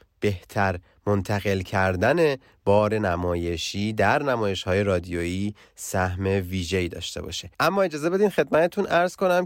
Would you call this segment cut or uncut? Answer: cut